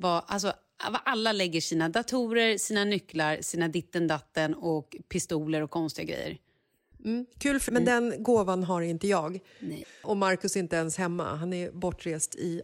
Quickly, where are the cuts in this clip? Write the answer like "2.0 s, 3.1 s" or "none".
7.7 s, 9.8 s